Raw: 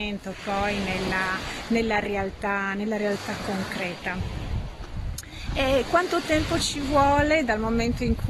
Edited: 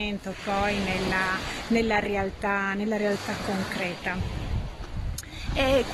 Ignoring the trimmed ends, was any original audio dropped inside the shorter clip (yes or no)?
no